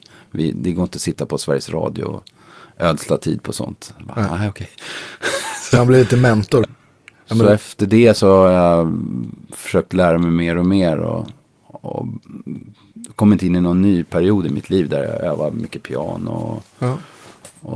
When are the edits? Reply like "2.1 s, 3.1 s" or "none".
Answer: 6.6 s